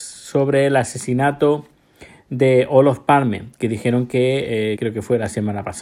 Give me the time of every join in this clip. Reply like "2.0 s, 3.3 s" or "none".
4.8 s